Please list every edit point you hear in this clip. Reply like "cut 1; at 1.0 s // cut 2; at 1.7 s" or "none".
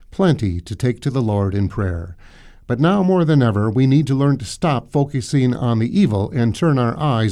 none